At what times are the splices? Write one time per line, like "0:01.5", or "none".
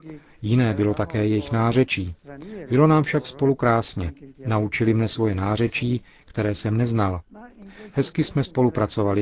none